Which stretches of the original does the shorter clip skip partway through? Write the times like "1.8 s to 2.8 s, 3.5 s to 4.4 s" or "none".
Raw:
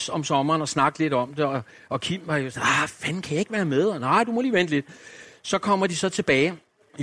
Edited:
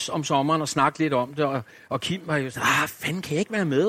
none